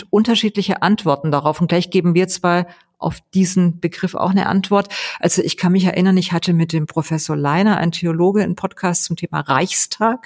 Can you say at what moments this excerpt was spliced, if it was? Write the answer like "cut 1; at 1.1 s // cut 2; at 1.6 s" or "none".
none